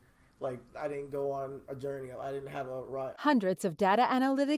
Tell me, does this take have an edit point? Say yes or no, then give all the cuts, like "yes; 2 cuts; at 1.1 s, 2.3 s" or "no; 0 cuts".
yes; 1 cut; at 3.1 s